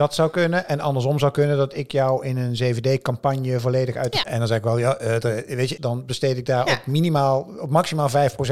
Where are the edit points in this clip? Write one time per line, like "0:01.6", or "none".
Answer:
0:04.2
0:05.8